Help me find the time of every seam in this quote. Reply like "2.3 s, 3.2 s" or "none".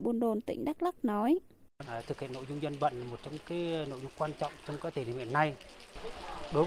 1.8 s

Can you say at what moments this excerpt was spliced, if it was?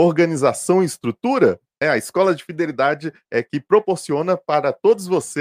1.8 s

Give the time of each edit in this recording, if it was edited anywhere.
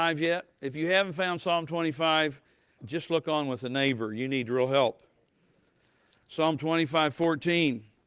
2.8 s

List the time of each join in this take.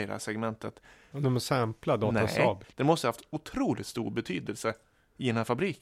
1.1 s, 2.6 s

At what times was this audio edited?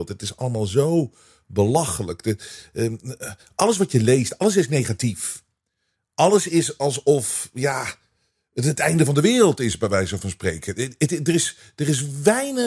none

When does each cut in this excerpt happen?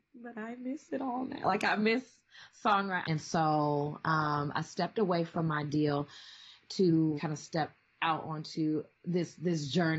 3.0 s, 7.2 s

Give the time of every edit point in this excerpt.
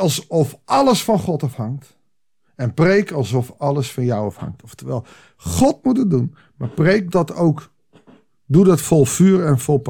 7.1 s

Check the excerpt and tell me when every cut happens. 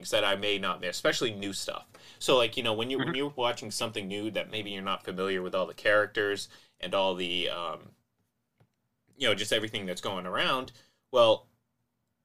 none

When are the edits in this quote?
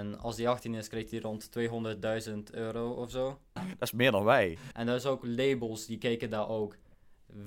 3.6 s, 4.7 s

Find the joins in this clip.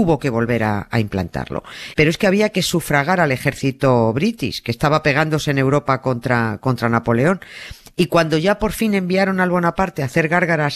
1.9 s

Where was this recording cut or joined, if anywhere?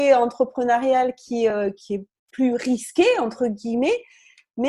none

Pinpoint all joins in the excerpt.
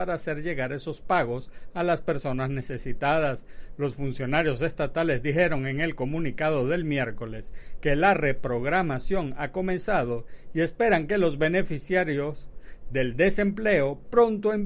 none

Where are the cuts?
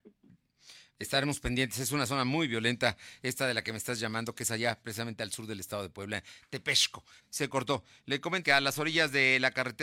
7.2 s, 8.4 s

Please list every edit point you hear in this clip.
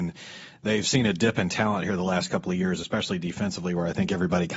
none

